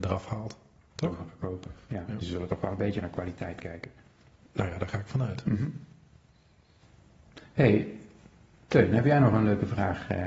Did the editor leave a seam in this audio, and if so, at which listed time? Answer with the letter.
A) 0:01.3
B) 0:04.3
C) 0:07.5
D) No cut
D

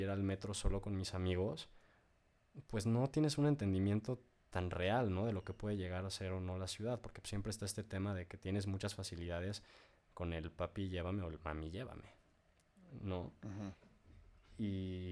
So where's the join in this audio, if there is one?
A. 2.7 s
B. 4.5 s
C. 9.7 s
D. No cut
B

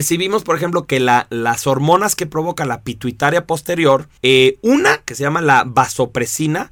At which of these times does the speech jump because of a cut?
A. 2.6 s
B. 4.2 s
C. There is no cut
B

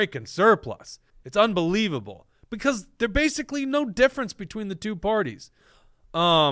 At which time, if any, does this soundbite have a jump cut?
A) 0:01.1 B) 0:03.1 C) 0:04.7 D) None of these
A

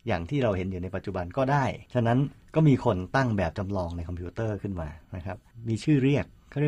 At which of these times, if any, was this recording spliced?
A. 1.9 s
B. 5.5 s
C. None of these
A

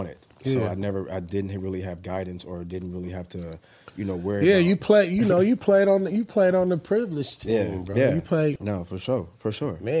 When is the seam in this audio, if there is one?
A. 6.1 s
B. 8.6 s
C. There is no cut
B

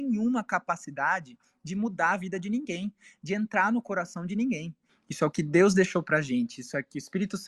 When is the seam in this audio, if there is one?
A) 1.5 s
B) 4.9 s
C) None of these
B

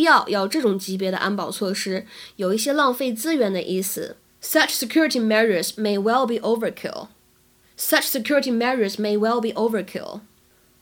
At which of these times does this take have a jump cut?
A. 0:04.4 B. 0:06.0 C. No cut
C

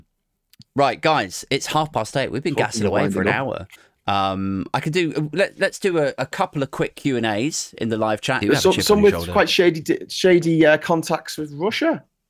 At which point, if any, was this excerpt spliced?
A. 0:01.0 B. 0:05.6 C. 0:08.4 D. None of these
C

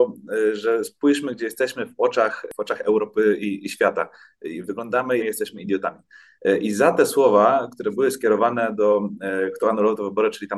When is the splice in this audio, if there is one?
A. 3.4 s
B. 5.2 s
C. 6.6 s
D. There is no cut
B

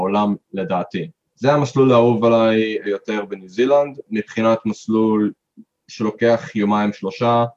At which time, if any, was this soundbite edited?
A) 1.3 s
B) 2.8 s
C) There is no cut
B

